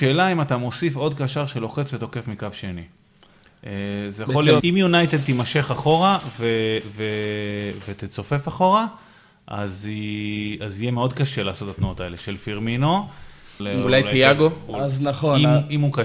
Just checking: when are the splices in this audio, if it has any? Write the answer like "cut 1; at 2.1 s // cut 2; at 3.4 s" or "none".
cut 1; at 4.6 s // cut 2; at 13.6 s